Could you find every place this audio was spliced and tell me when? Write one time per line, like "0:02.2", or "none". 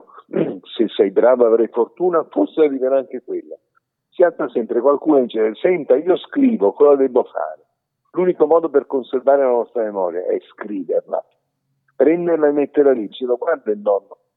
0:04.0
0:08.0
0:13.1